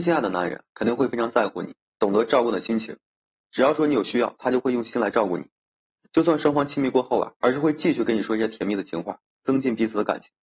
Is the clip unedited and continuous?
no; 1 cut; at 7.4 s

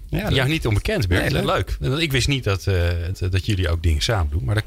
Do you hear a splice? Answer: yes; 1 cut; at 3.1 s

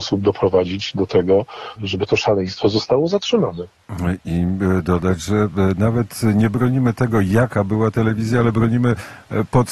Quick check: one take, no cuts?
no; 1 cut; at 1.8 s

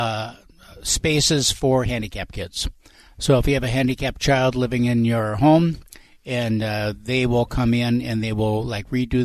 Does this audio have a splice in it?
no; 0 cuts

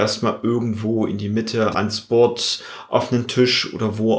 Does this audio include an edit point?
yes; 1 cut; at 1.7 s

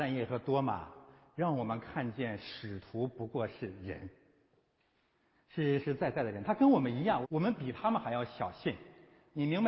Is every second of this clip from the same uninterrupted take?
no; 2 cuts; at 5.8 s, 7.2 s

